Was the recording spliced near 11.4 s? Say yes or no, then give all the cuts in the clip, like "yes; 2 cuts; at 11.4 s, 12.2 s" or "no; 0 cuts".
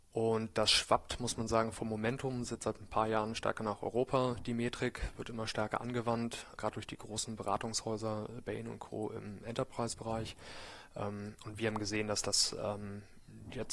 no; 1 cut; at 6.6 s